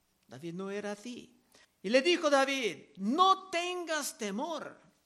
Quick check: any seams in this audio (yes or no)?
yes